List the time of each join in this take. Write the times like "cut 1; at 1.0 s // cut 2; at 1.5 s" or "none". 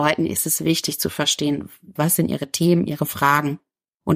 cut 1; at 2.0 s